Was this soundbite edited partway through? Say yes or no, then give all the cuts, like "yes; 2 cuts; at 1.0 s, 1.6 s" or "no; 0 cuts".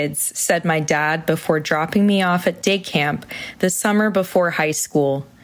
no; 0 cuts